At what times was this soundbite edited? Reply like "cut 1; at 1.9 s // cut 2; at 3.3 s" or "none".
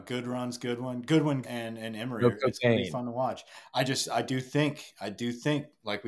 cut 1; at 1.4 s